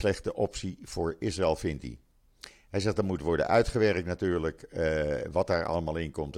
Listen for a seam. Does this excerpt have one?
no; 0 cuts

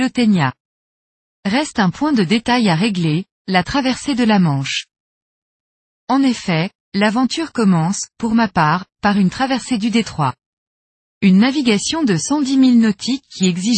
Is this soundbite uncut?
yes; 0 cuts

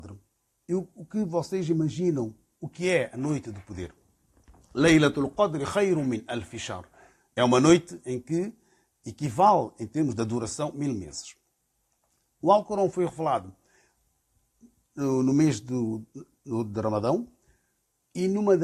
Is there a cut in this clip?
no; 0 cuts

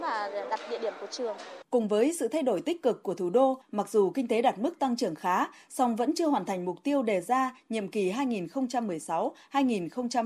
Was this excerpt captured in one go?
no; 2 cuts; at 1.6 s, 3.6 s

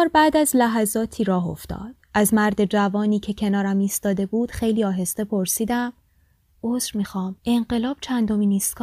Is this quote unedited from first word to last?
no; 2 cuts; at 2.0 s, 7.4 s

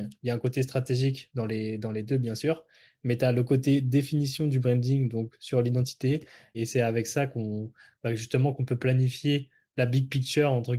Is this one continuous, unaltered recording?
no; 1 cut; at 6.5 s

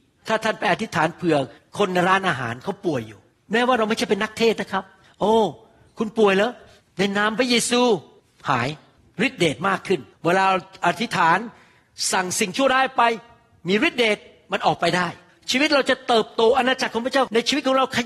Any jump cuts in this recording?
no; 0 cuts

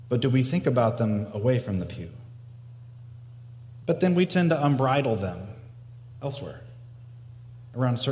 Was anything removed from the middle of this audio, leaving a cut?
yes; 1 cut; at 3.8 s

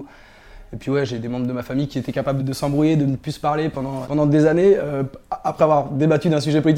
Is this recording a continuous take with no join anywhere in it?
no; 2 cuts; at 2.4 s, 4.0 s

